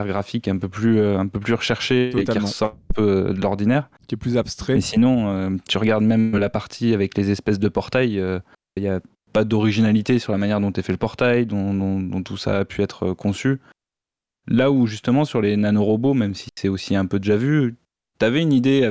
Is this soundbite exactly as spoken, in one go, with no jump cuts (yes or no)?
no